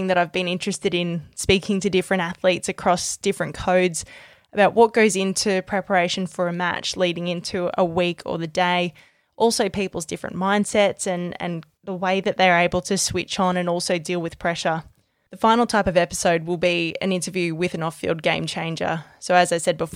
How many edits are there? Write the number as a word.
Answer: zero